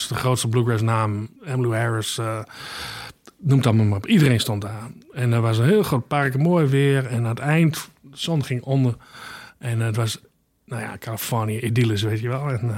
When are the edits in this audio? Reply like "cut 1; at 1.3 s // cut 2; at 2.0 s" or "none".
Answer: cut 1; at 1.4 s